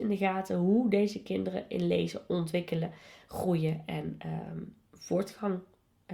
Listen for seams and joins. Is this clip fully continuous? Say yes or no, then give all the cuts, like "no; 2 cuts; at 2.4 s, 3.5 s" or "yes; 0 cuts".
yes; 0 cuts